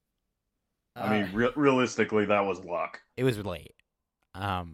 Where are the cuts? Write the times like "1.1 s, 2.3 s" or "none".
3.1 s